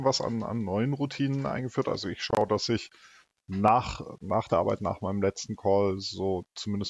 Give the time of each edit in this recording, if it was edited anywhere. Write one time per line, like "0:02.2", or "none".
none